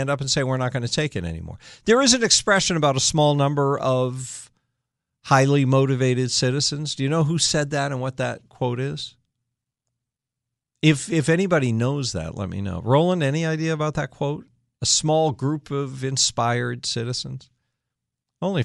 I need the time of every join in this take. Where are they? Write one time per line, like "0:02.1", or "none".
none

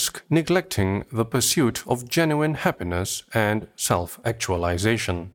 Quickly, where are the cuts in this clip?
none

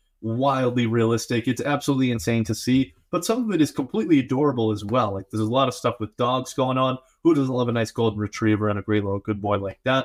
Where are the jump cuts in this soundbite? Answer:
none

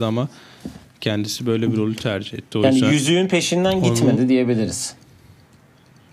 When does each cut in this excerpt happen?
none

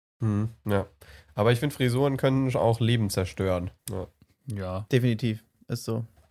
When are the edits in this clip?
0:03.8

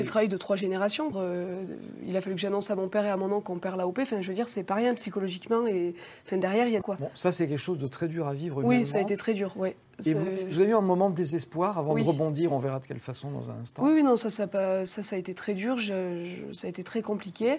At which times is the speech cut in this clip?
0:01.1
0:06.8

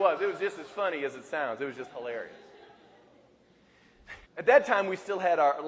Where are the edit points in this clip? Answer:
0:04.3

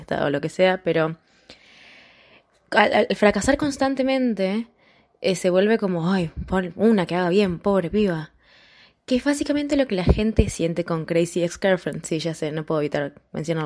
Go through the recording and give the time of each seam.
none

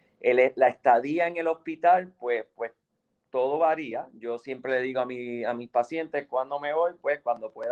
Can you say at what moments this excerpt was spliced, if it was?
none

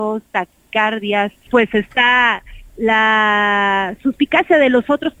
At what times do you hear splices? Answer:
0:01.5

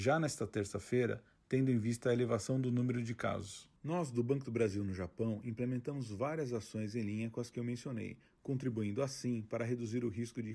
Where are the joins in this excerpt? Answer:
0:03.8

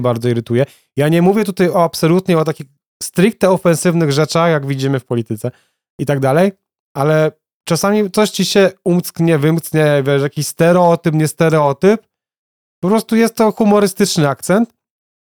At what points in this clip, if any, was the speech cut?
none

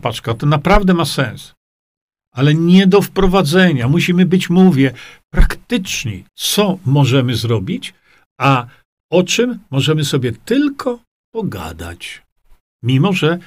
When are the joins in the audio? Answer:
none

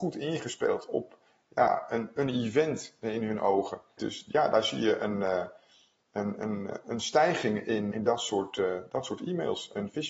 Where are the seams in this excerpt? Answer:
0:04.0
0:07.9

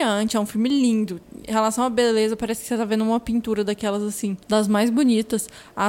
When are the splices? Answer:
none

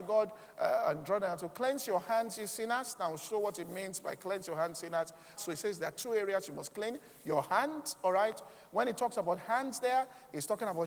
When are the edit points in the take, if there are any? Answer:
0:05.4

